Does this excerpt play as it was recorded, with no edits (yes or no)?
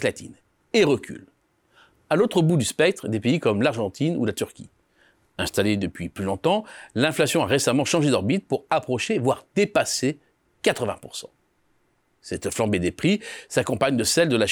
yes